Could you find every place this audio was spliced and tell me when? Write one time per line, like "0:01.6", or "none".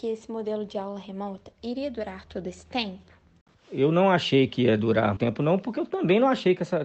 0:05.2